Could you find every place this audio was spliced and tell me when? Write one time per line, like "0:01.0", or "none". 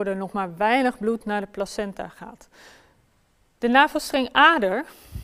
none